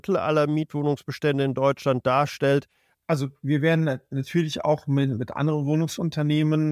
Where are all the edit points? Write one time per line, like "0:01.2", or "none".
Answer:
0:02.9